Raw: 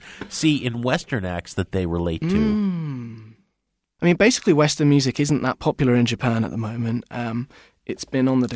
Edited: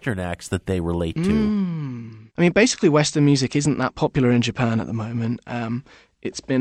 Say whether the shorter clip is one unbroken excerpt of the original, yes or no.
no